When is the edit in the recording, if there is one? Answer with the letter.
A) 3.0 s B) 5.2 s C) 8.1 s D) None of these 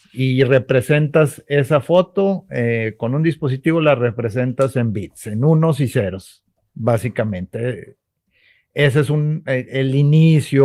D